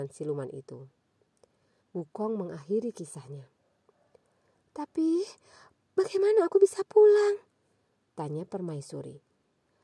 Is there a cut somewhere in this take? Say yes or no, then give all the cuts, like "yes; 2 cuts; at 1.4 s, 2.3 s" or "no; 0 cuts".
yes; 1 cut; at 1.8 s